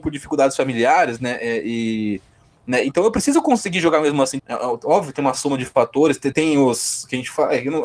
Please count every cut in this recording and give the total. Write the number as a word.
two